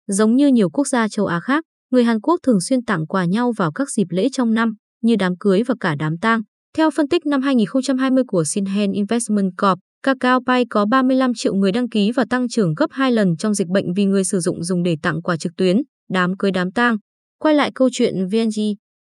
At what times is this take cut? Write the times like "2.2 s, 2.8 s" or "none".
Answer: 6.6 s